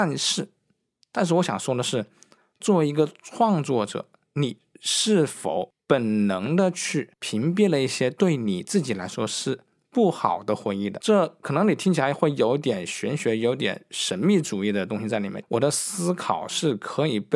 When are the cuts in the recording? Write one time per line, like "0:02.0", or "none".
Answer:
0:15.4